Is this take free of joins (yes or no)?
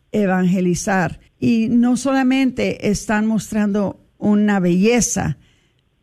no